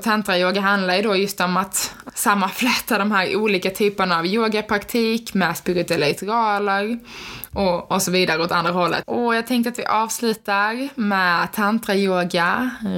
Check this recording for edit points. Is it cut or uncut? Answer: cut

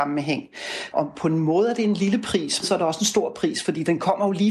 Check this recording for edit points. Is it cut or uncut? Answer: cut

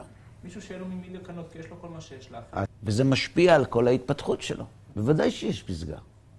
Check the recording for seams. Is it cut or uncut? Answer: cut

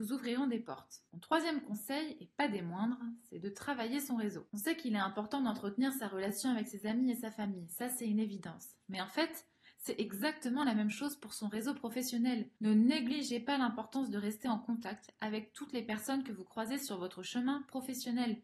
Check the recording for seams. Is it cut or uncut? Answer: uncut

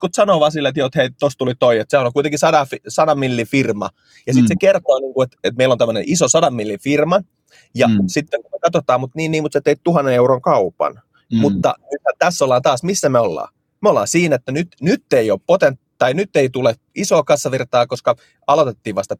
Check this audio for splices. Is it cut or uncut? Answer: uncut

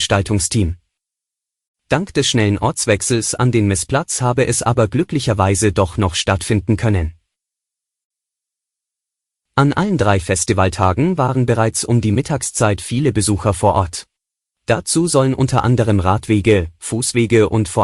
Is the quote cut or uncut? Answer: cut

